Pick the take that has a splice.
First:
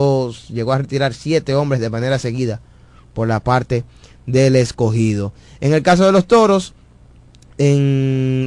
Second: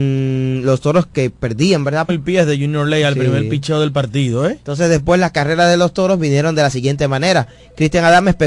second; 1 cut; at 2.1 s

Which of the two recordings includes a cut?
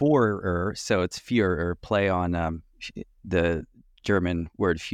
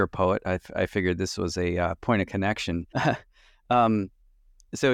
second; 1 cut; at 2.9 s

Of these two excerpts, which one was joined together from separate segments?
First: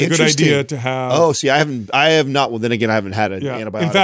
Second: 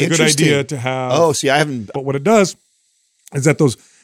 second; 1 cut; at 1.9 s

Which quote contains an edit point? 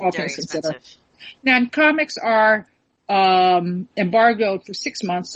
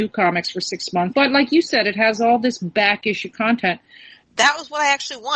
second; 2 cuts; at 1.1 s, 4.2 s

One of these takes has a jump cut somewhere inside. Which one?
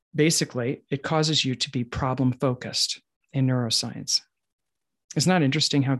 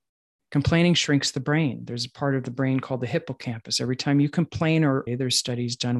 second; 1 cut; at 5.1 s

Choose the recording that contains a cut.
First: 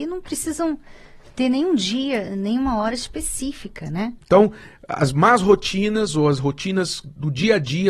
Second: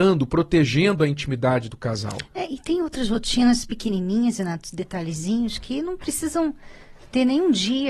first; 1 cut; at 4.2 s

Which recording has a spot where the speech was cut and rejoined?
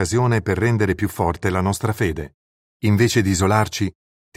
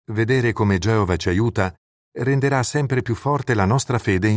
first; 1 cut; at 2.7 s

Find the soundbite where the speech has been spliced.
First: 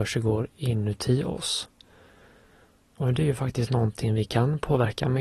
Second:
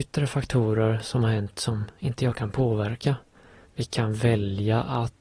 second; 1 cut; at 3.6 s

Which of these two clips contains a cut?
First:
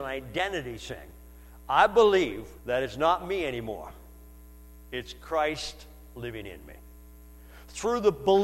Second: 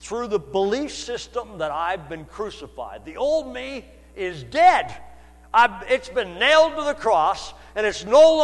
first; 1 cut; at 2.6 s

